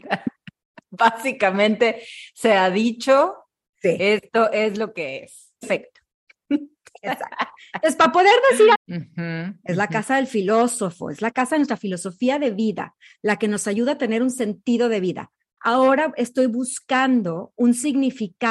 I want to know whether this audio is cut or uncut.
cut